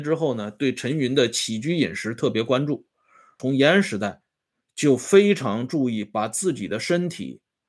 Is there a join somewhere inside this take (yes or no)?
yes